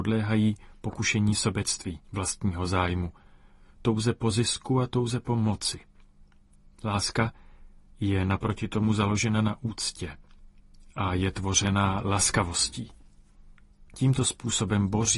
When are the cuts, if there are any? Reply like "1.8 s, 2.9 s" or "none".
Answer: 2.0 s